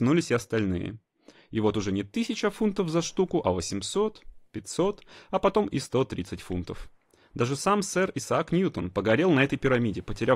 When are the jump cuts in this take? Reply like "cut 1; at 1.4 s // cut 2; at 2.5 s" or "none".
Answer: none